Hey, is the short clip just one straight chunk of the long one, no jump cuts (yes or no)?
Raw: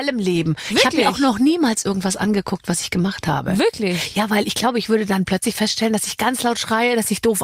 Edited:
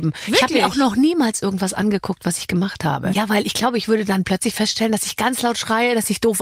no